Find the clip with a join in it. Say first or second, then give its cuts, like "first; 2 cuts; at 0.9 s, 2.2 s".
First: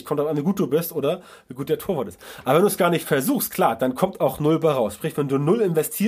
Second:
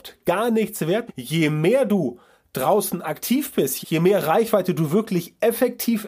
second; 2 cuts; at 1.1 s, 3.8 s